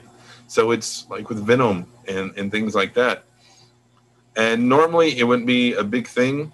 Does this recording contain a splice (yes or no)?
no